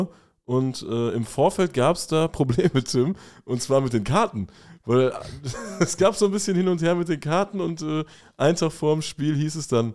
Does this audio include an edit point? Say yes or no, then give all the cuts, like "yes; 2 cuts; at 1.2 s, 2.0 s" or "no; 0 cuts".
no; 0 cuts